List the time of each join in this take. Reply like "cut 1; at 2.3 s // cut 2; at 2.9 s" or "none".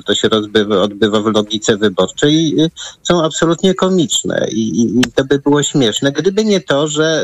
none